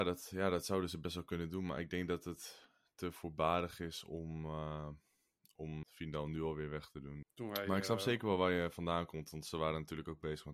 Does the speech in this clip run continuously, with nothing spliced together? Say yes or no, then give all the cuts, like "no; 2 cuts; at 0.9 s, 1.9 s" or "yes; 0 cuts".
no; 2 cuts; at 5.8 s, 7.2 s